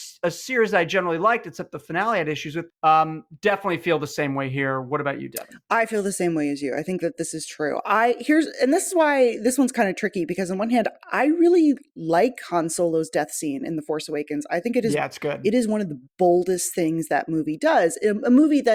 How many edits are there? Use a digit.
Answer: 1